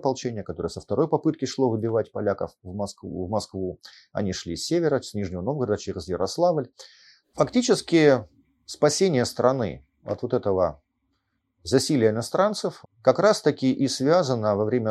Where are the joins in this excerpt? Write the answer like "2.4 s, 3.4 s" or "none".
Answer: 7.2 s, 12.8 s